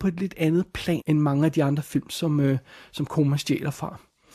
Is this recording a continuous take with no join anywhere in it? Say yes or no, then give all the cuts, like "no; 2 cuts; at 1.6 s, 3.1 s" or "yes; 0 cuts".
no; 1 cut; at 1.0 s